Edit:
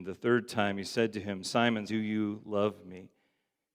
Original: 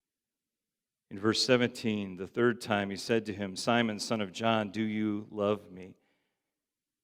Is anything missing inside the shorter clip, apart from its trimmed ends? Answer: yes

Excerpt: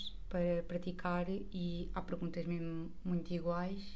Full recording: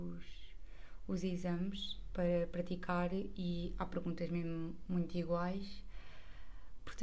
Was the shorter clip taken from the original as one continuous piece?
yes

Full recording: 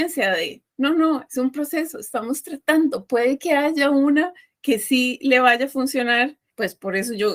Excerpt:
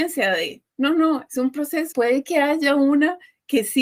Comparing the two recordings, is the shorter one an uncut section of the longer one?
no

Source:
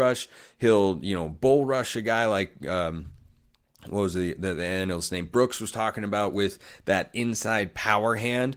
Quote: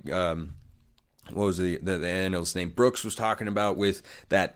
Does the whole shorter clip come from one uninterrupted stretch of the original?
yes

